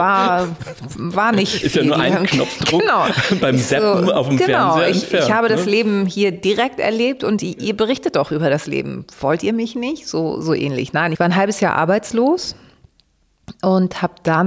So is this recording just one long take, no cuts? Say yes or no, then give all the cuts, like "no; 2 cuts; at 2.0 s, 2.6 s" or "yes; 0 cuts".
yes; 0 cuts